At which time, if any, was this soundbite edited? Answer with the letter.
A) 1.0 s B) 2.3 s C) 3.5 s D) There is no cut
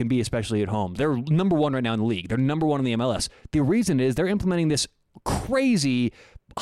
A